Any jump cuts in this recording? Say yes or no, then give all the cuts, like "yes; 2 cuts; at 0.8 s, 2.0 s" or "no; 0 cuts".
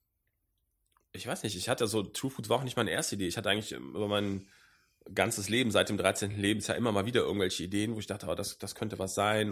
no; 0 cuts